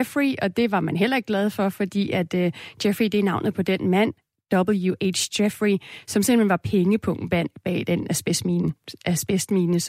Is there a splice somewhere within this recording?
no; 0 cuts

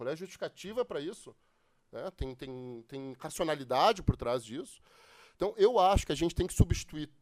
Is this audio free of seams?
yes; 0 cuts

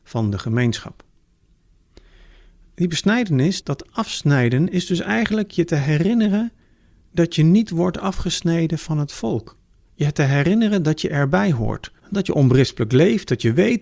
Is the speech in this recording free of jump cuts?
no; 2 cuts; at 3.6 s, 12.0 s

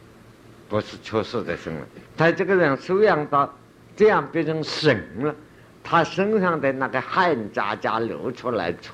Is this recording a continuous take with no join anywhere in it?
no; 1 cut; at 2.1 s

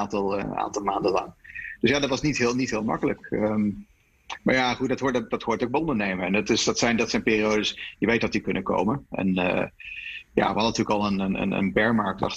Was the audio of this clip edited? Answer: no; 0 cuts

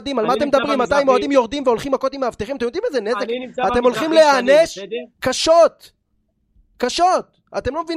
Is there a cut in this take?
no; 0 cuts

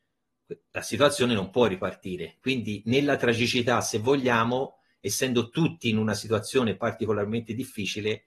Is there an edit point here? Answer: no; 0 cuts

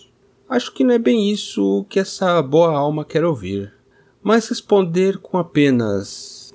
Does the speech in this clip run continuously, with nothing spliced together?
yes; 0 cuts

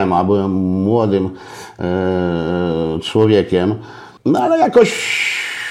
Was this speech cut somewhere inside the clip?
no; 0 cuts

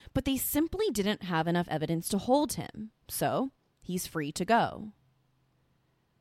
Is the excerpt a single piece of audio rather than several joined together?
no; 1 cut; at 3.0 s

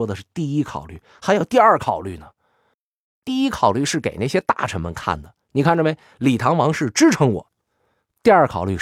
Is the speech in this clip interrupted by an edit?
no; 0 cuts

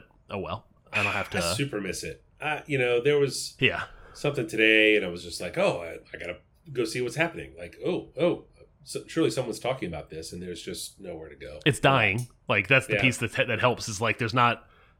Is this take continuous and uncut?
yes; 0 cuts

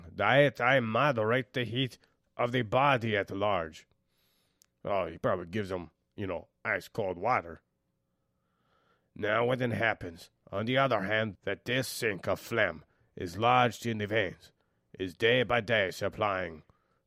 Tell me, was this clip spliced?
no; 0 cuts

